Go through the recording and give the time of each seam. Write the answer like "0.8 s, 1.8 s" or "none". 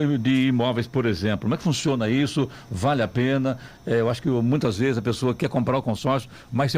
none

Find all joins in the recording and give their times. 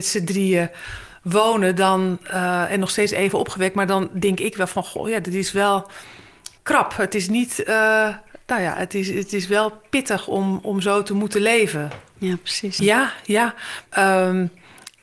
6.6 s, 12.8 s, 13.9 s

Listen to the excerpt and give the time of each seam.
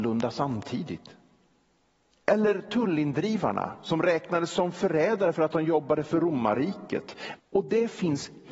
7.4 s

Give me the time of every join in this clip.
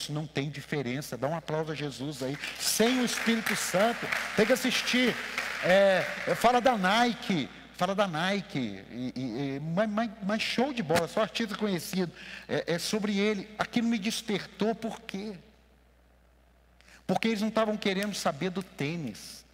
none

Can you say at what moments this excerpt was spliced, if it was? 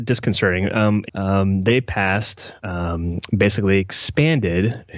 1.1 s, 2.6 s

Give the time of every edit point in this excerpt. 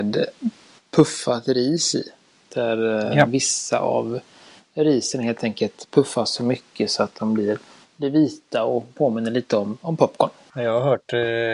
none

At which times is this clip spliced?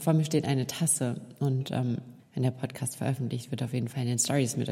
2.2 s

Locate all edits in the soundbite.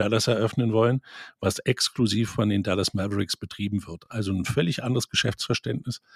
none

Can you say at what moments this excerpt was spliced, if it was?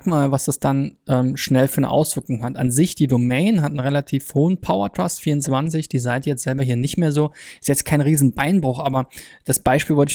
none

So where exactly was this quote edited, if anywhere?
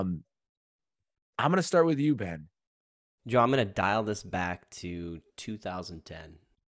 3.2 s

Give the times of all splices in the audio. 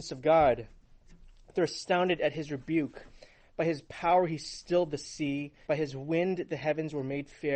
5.7 s

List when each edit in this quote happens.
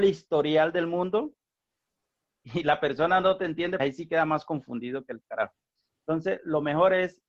3.8 s

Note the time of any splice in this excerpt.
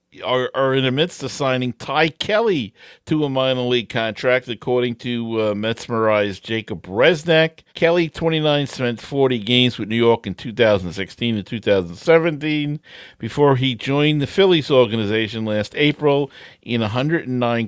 7.7 s

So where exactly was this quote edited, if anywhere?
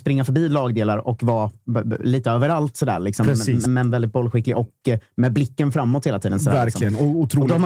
3.7 s

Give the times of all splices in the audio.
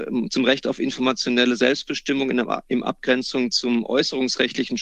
none

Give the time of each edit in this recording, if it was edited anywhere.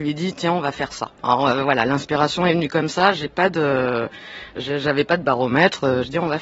1.2 s

